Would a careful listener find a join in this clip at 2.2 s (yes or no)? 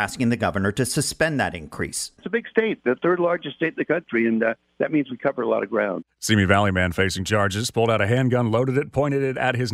yes